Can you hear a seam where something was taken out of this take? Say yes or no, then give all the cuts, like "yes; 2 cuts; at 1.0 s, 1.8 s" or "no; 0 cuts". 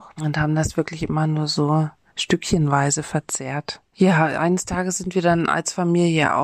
yes; 1 cut; at 3.9 s